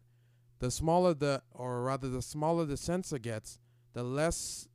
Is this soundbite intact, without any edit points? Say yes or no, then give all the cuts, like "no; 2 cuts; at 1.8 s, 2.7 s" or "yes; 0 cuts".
no; 1 cut; at 1.5 s